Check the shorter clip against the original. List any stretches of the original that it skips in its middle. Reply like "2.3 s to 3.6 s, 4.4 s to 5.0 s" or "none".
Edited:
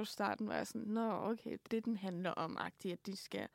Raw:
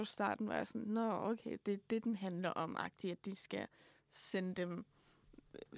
1.7 s to 1.8 s